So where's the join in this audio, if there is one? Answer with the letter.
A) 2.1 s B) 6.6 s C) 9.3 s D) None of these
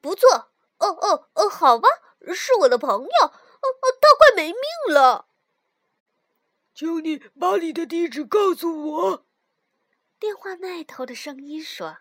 D